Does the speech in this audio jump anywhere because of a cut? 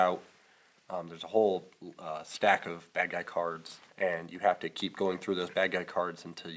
yes; 1 cut; at 3.9 s

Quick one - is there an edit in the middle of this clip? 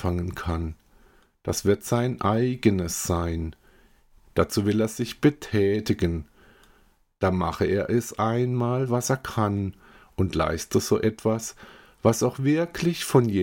yes; 1 cut; at 4.2 s

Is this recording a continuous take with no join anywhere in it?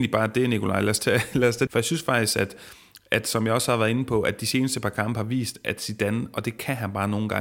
no; 1 cut; at 1.7 s

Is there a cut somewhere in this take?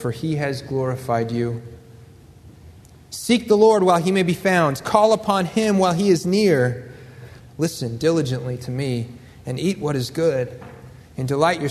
yes; 1 cut; at 7.4 s

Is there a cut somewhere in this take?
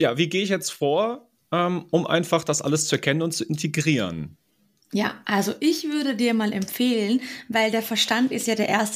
no; 0 cuts

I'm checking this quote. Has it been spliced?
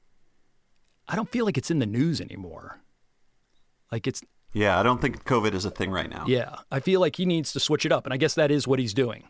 no; 0 cuts

